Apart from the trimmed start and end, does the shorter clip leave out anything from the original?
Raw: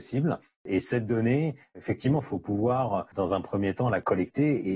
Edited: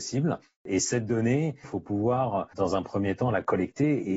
yes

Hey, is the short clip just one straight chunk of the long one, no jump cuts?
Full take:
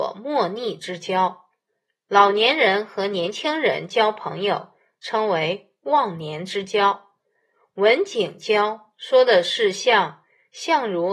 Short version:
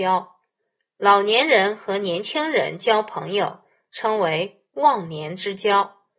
yes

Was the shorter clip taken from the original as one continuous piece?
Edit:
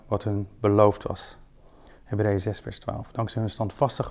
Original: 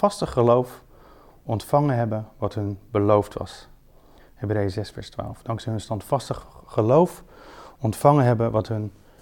yes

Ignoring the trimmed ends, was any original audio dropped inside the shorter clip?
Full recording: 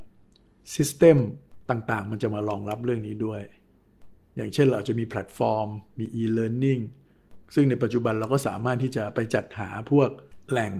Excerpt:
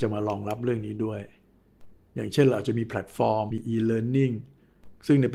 yes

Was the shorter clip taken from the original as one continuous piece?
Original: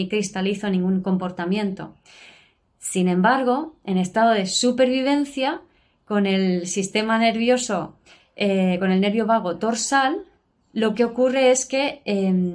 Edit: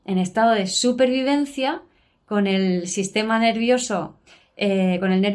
yes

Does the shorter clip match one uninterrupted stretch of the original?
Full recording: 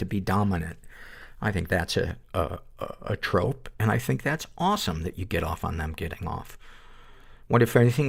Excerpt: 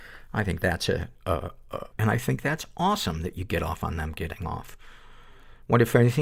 no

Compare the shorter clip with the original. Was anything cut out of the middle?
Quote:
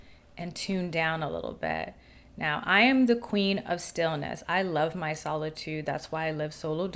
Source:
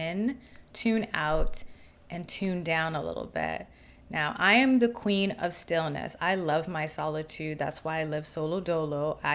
no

